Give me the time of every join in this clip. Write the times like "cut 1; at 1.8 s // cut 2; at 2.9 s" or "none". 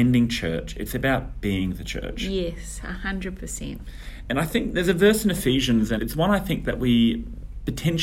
cut 1; at 6.0 s